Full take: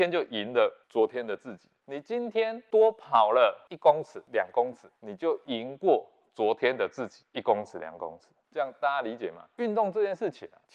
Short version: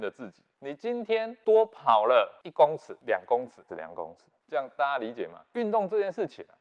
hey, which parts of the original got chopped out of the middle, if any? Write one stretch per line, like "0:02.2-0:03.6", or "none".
0:04.9-0:07.7